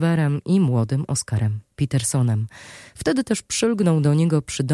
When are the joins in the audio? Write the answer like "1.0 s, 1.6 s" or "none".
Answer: none